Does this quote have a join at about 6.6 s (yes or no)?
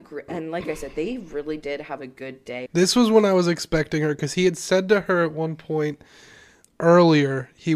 yes